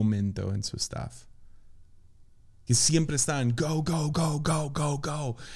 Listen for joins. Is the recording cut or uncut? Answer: cut